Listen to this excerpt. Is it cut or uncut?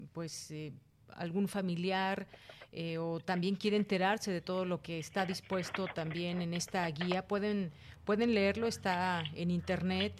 uncut